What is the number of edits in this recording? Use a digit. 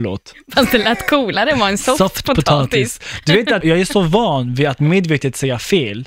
1